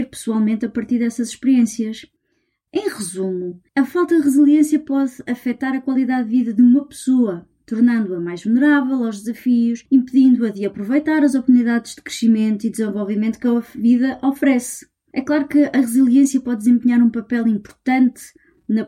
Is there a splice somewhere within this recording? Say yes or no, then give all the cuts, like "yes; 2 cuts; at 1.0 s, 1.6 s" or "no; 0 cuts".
no; 0 cuts